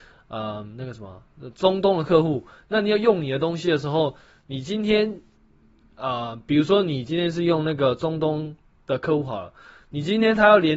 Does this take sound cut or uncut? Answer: uncut